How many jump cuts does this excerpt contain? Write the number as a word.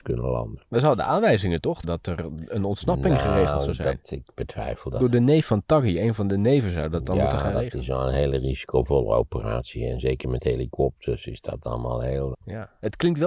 two